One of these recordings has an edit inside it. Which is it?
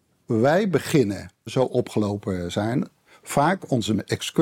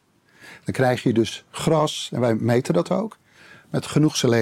first; 1 cut; at 1.5 s

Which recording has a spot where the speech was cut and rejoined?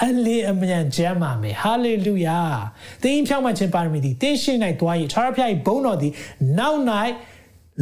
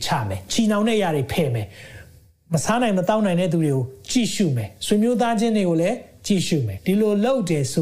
second; 1 cut; at 6.8 s

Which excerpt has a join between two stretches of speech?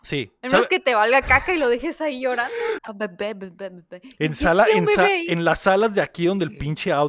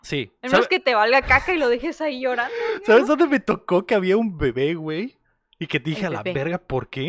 first; 1 cut; at 2.8 s

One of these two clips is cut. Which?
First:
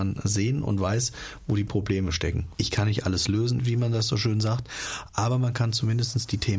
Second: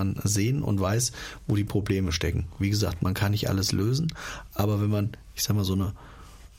first; 2 cuts; at 2.5 s, 3.6 s

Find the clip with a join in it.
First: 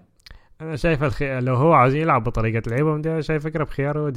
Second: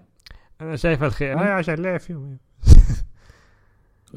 second; 1 cut; at 1.3 s

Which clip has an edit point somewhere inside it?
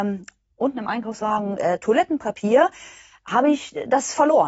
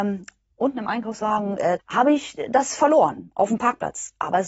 second; 1 cut; at 1.8 s

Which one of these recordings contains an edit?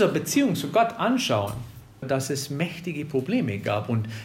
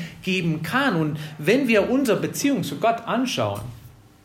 first; 1 cut; at 2.0 s

